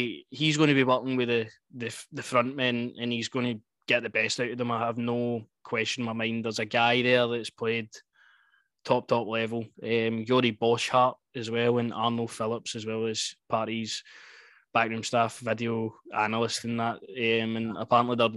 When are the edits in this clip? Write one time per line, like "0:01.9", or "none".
0:09.7

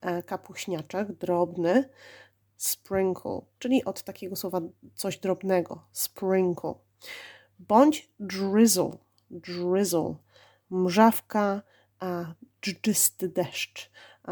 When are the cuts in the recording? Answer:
0:02.4

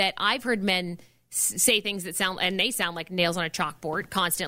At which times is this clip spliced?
none

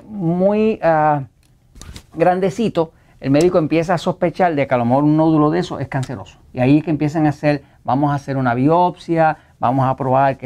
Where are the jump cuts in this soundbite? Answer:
0:02.1
0:06.5

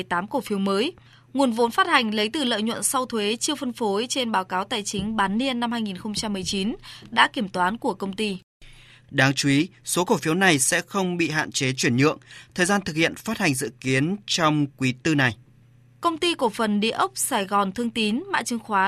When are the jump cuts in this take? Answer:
0:09.0

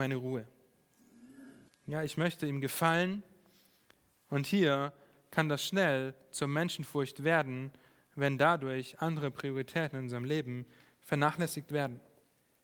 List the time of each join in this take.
0:01.7

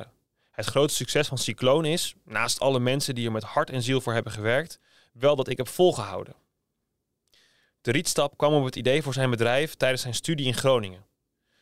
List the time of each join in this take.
none

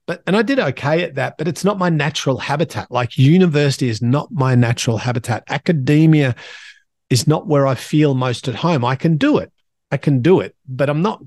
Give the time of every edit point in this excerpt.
none

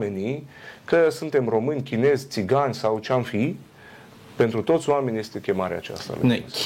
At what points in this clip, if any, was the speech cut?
none

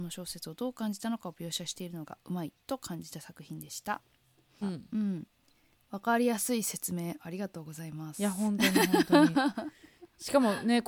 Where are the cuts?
0:04.6

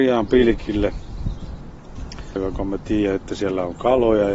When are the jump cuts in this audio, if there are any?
0:02.4

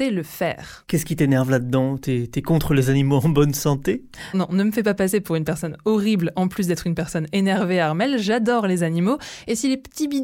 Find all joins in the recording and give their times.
0:04.3

